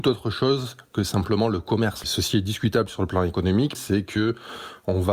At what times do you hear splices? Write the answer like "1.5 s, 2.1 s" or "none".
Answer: 2.0 s, 3.7 s